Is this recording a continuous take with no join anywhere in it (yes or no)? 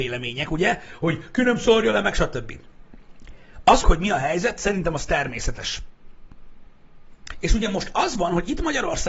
no